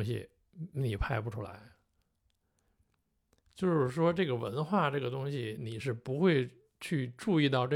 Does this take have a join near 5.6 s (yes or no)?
yes